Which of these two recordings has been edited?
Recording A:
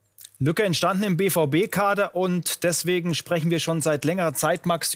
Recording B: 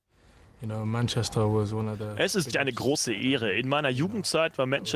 B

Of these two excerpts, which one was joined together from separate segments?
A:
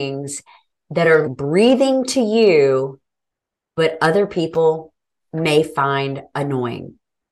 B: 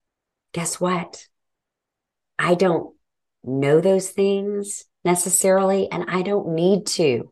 A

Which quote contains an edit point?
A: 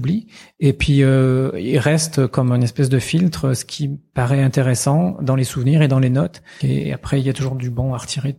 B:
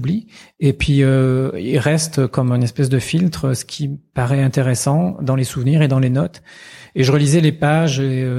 A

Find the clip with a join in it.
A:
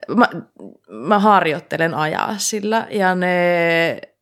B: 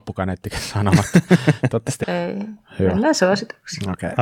B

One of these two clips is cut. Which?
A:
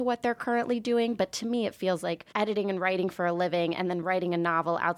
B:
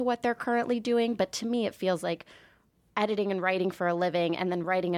A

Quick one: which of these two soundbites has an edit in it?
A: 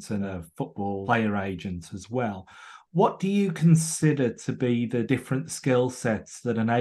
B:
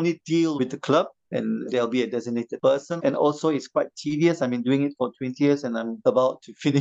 B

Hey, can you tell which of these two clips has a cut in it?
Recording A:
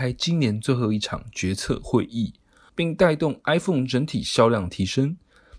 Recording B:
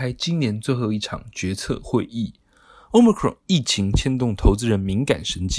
A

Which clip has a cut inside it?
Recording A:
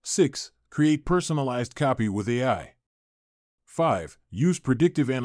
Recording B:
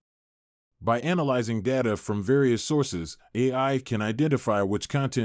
A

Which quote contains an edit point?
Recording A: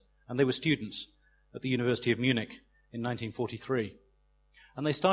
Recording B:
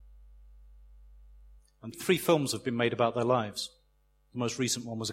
B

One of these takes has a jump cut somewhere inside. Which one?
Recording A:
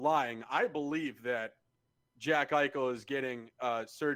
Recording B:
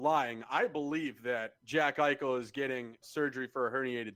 B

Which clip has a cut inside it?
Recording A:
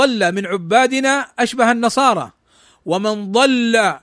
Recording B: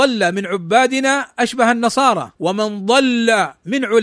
B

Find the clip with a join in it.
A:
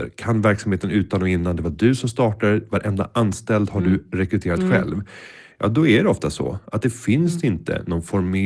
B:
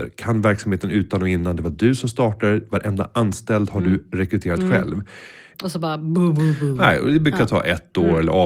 B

